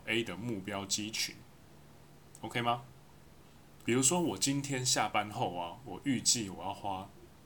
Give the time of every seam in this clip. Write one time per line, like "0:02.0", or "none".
0:03.8